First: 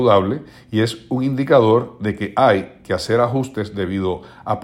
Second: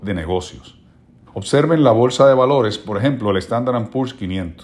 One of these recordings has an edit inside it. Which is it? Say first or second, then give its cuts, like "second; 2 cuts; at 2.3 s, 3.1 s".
second; 1 cut; at 1.3 s